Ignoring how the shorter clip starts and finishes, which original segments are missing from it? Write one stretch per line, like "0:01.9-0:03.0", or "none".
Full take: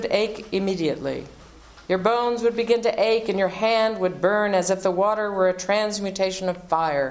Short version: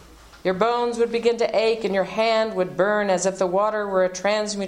none